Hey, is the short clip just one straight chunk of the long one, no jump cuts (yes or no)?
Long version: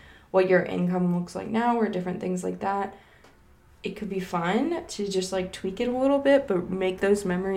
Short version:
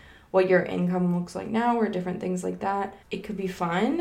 no